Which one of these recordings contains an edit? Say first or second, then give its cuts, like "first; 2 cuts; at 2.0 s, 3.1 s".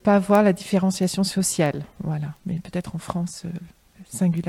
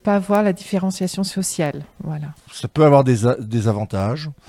second; 1 cut; at 2.4 s